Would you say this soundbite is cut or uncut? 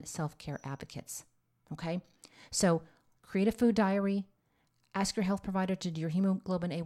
cut